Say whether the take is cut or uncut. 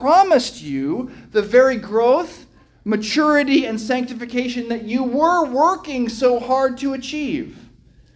uncut